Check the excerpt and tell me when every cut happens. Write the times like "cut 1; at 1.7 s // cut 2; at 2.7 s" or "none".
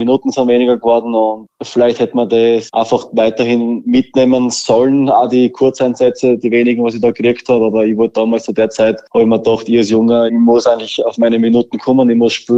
cut 1; at 10.3 s

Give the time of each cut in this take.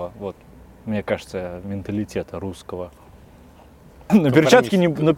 cut 1; at 4.1 s

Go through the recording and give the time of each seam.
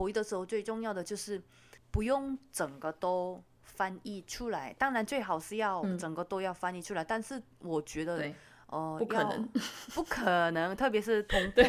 none

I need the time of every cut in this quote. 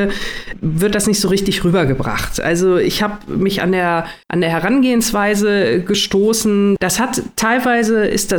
cut 1; at 4.2 s // cut 2; at 6.8 s

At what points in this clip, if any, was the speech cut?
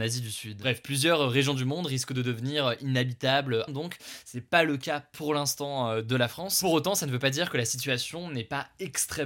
cut 1; at 3.7 s

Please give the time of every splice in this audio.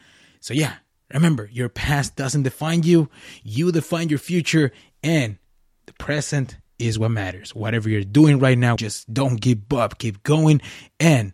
cut 1; at 8.8 s

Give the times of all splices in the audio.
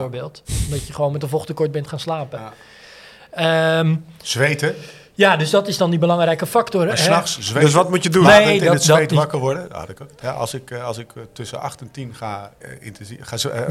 cut 1; at 10.2 s // cut 2; at 12.6 s

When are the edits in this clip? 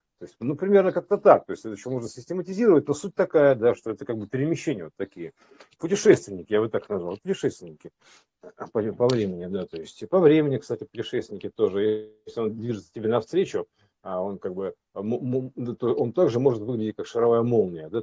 none

